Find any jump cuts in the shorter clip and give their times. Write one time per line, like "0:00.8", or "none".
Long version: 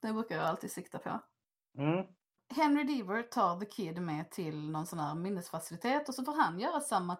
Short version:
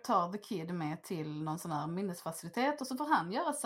none